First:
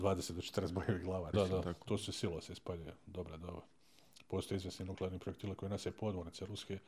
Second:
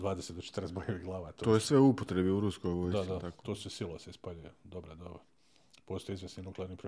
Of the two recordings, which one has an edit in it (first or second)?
first